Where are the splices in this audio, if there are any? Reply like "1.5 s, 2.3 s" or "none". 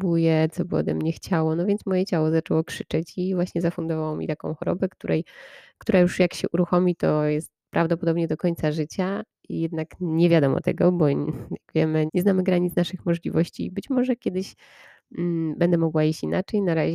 12.1 s